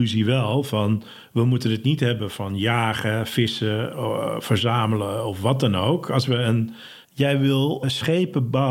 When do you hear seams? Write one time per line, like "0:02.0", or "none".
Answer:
0:07.0